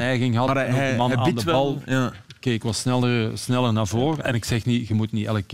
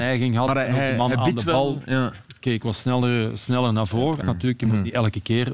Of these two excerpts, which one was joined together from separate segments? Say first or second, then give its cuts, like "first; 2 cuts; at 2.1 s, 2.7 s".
second; 1 cut; at 4.2 s